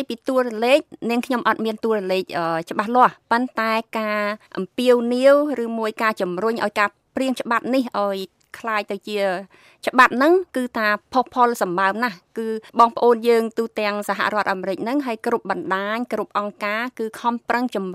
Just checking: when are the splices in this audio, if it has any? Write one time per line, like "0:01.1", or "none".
0:04.5
0:12.7